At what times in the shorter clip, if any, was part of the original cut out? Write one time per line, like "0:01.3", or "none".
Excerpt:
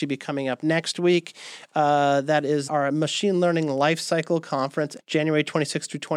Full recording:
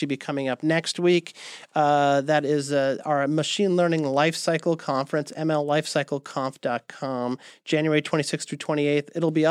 0:02.7
0:05.0